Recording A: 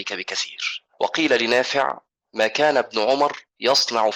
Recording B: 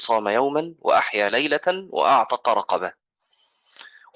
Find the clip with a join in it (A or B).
A